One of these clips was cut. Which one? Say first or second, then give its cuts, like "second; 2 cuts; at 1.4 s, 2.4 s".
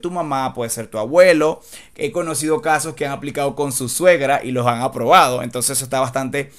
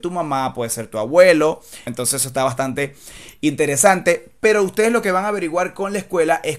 second; 1 cut; at 1.9 s